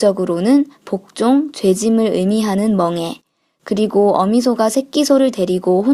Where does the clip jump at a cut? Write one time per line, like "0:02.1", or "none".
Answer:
none